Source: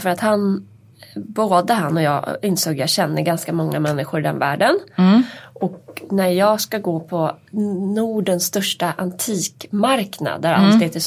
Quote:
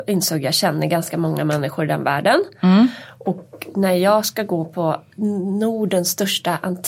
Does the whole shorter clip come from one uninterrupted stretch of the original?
yes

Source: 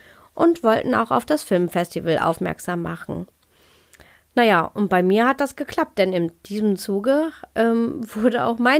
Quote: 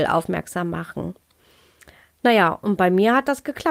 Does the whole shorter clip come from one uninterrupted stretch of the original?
yes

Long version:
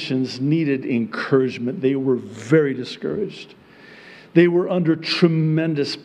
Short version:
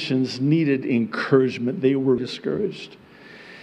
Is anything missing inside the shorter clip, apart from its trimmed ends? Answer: yes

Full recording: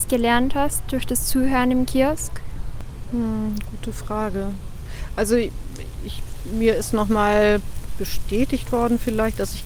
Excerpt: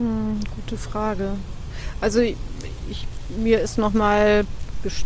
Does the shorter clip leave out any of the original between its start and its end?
no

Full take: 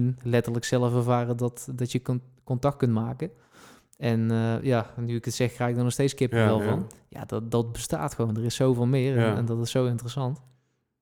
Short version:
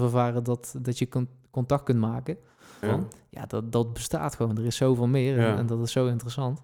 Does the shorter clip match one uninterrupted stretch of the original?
no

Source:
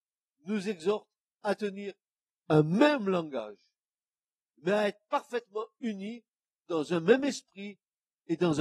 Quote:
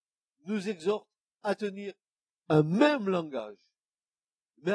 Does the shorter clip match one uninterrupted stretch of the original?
yes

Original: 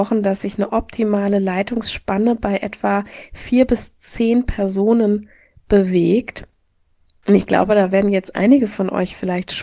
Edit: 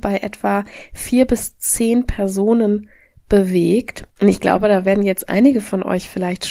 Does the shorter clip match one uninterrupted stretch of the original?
no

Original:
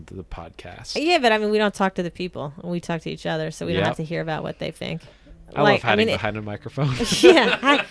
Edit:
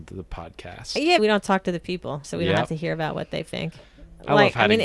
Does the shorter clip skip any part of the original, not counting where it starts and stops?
yes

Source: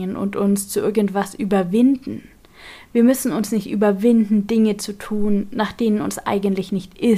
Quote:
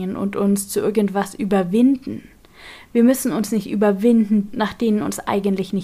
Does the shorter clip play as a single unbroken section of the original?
no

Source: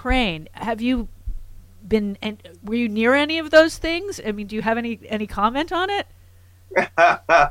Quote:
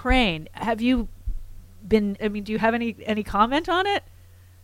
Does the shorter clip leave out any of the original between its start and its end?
yes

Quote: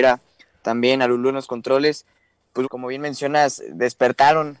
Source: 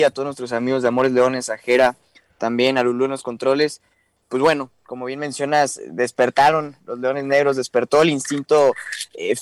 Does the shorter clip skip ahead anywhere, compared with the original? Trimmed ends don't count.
yes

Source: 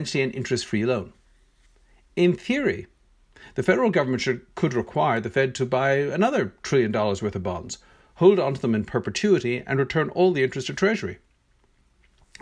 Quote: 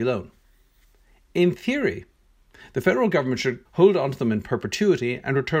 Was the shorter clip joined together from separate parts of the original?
yes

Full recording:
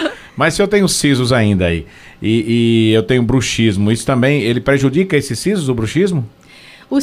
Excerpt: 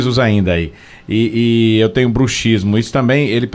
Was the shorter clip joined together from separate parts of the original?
no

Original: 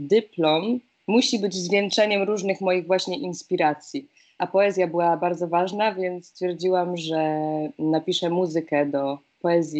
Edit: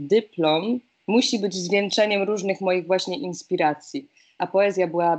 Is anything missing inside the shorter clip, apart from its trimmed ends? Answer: no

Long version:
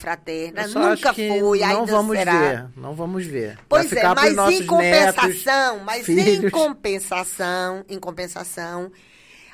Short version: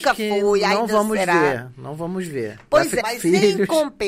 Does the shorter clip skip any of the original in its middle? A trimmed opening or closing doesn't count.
yes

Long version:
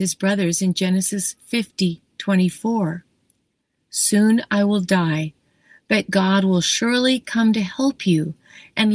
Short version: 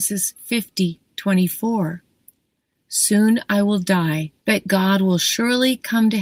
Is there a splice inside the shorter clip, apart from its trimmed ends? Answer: yes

